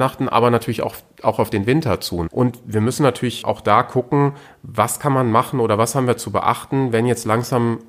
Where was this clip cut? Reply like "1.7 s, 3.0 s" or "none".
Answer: 2.3 s, 3.4 s